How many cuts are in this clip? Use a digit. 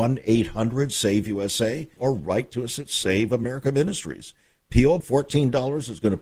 2